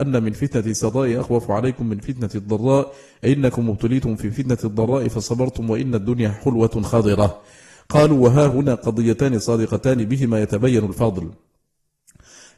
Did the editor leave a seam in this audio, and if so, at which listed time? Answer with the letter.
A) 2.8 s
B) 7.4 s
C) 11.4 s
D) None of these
D